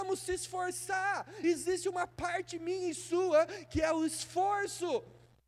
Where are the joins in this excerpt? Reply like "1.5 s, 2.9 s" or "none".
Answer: none